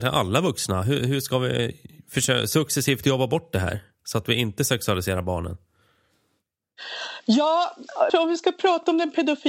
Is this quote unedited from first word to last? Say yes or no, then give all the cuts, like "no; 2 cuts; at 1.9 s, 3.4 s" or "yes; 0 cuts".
no; 1 cut; at 8.1 s